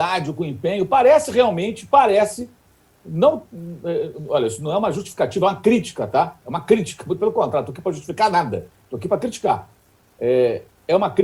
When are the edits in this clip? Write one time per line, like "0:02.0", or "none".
none